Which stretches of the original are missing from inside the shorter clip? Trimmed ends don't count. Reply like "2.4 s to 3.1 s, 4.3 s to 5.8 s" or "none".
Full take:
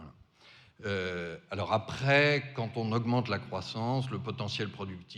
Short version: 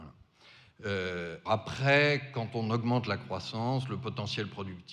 1.4 s to 1.7 s

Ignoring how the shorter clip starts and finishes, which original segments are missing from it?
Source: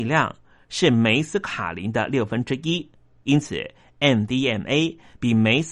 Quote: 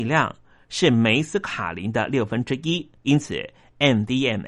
3.0 s to 3.2 s

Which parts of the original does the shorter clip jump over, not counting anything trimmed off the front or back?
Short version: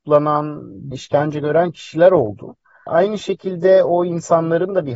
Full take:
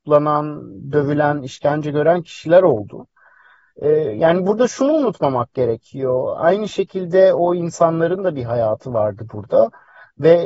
0.9 s to 1.4 s, 3.4 s to 6.4 s

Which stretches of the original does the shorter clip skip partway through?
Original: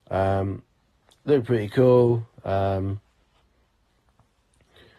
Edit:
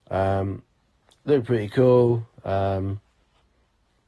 none

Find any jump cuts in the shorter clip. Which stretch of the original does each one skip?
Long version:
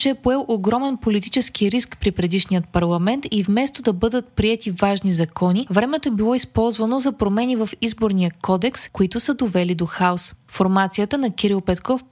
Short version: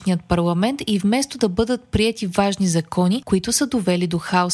5.7 s to 8.9 s

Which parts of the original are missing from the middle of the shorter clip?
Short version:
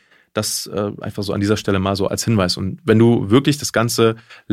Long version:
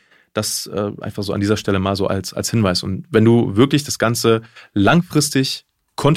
2.1 s to 2.3 s

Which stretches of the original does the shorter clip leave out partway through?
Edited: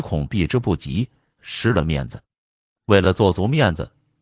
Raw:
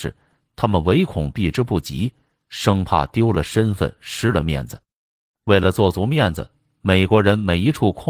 2.4 s to 4.0 s

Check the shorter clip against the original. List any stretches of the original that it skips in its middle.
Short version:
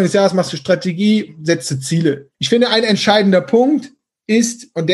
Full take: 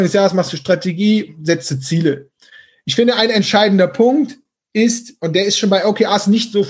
2.3 s to 2.8 s

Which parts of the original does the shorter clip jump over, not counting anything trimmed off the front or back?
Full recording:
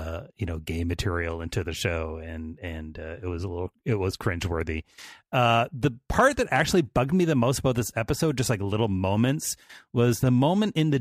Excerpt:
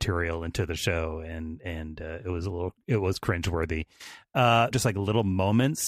5.7 s to 8.4 s

